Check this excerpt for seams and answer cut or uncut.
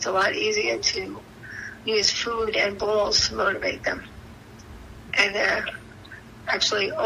cut